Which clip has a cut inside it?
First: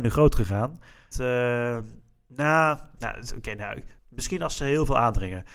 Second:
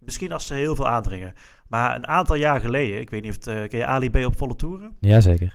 first; 2 cuts; at 1.1 s, 4.0 s

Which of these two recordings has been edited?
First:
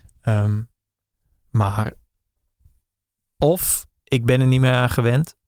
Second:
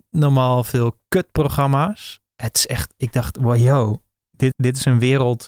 second; 1 cut; at 4.5 s

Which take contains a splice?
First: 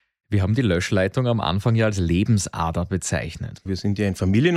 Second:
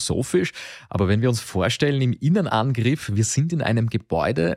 first; 1 cut; at 3.7 s

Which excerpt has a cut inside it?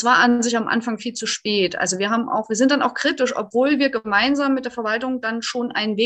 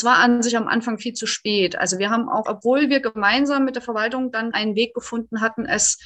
second; 2 cuts; at 2.5 s, 4.5 s

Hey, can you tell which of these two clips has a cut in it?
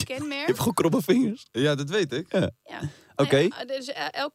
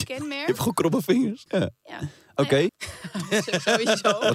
second; 2 cuts; at 1.5 s, 2.7 s

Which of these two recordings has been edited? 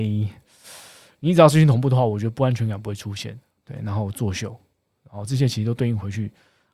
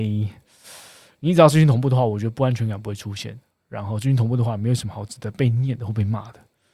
first; 1 cut; at 3.6 s

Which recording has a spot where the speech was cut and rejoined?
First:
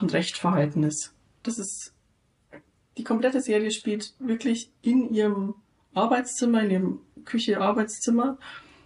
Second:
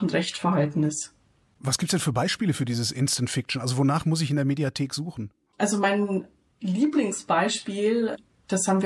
first; 1 cut; at 1.4 s

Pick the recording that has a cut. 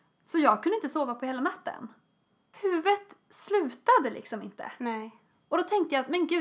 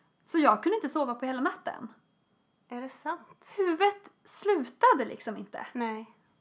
first; 1 cut; at 2.5 s

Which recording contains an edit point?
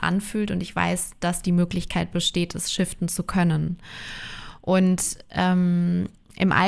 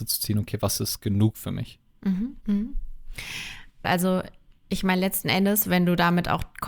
second; 2 cuts; at 2.4 s, 3.8 s

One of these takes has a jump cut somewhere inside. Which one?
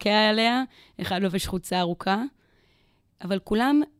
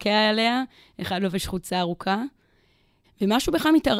second; 1 cut; at 3.0 s

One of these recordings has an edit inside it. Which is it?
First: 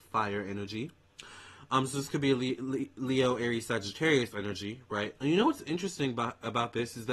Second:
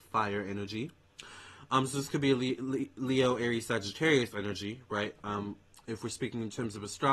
first; 1 cut; at 5.2 s

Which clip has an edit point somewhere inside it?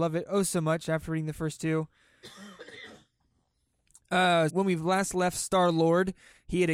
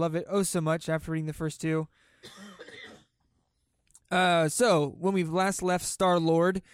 first; 1 cut; at 4.5 s

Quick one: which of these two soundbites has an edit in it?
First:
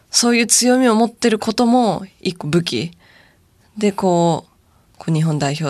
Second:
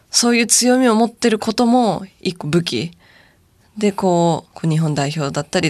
second; 1 cut; at 4.5 s

